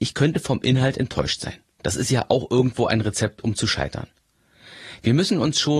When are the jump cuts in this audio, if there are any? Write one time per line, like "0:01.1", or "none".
0:01.8